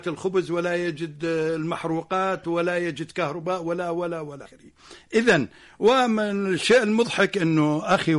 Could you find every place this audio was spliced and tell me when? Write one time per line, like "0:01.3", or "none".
none